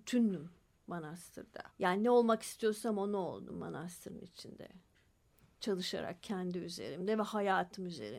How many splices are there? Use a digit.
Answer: 1